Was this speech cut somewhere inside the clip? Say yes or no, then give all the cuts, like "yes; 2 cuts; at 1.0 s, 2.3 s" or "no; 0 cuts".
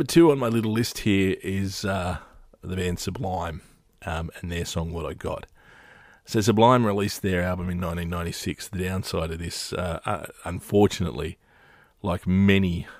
no; 0 cuts